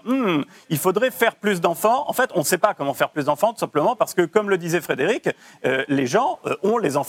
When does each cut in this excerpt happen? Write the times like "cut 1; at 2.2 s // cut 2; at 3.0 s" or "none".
none